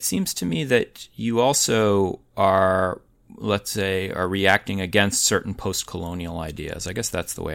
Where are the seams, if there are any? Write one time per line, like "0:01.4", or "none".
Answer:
none